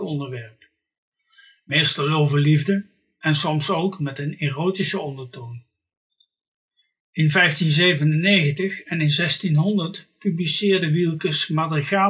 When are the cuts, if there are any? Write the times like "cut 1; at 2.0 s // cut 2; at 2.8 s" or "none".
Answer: none